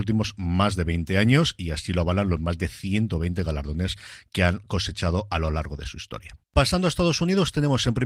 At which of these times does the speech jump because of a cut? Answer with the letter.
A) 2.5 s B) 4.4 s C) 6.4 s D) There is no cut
C